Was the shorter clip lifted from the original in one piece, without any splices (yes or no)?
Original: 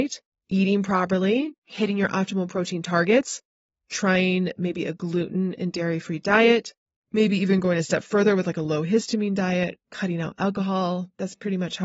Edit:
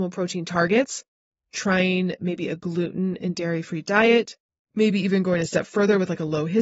yes